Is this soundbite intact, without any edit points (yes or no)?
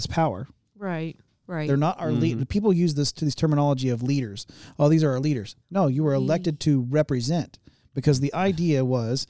no